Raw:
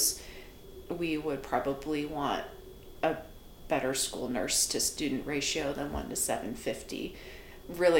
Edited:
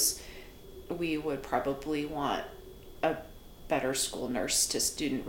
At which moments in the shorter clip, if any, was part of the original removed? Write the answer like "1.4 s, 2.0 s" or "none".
none